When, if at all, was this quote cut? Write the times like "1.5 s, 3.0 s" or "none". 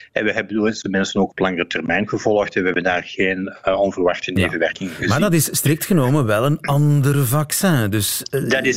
none